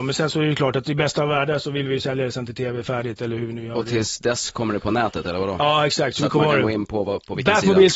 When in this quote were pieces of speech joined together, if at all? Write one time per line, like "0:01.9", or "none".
none